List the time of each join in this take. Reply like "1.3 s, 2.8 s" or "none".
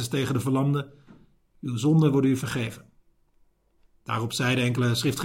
1.5 s